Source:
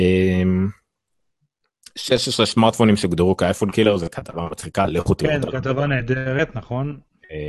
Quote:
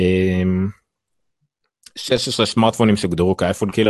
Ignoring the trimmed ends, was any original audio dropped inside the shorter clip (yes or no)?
no